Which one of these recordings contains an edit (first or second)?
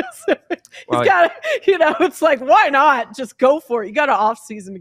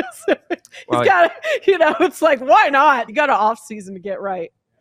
second